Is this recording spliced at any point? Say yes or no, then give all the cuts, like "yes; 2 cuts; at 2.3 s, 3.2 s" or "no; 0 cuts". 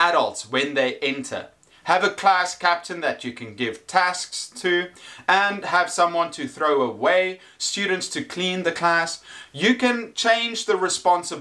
no; 0 cuts